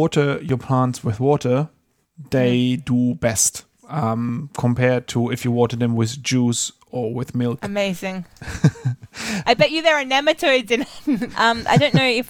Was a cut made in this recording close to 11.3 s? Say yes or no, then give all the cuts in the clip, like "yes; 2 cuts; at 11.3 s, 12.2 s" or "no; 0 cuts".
yes; 2 cuts; at 9.4 s, 11.3 s